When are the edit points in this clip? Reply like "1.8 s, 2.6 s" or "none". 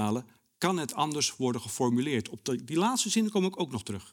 none